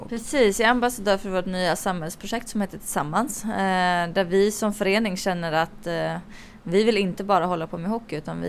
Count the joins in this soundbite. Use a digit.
0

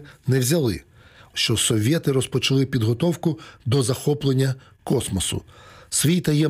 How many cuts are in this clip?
1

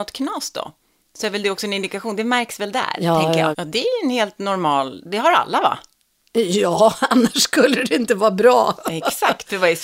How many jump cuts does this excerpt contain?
1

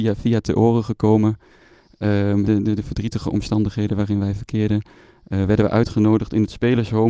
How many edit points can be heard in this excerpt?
1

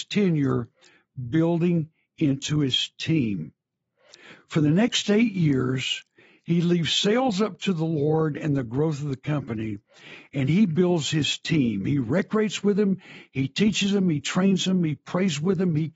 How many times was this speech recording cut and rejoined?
0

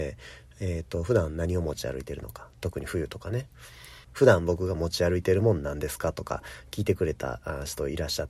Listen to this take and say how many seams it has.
1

